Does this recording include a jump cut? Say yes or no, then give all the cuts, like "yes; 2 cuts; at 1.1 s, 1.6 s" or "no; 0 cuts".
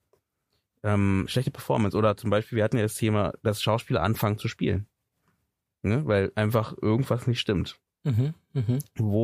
no; 0 cuts